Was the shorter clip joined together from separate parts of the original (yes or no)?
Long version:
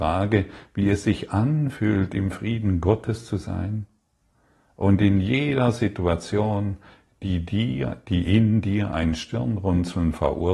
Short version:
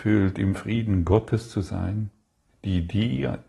yes